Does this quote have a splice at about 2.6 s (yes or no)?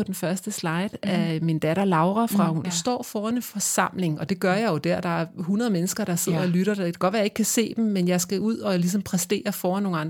yes